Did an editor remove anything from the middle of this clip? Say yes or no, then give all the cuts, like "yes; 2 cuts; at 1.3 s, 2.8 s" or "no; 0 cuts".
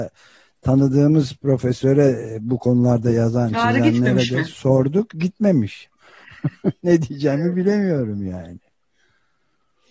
yes; 1 cut; at 5.9 s